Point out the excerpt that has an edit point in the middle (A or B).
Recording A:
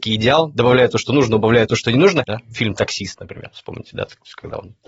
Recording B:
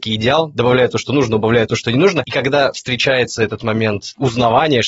A